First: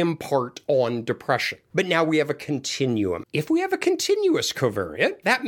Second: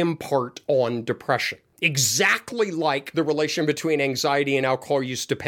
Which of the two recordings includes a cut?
first; 2 cuts; at 1.7 s, 3.2 s

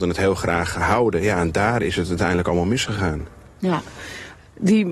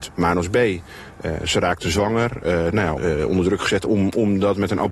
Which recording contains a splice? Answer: second; 1 cut; at 3.0 s

